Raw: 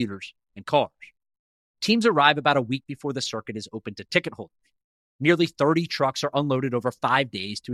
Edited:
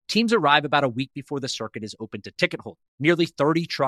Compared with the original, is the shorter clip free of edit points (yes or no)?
no